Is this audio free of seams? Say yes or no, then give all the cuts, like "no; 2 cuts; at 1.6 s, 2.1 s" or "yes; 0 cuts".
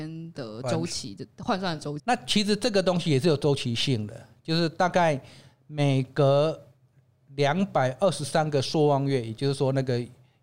no; 1 cut; at 2.0 s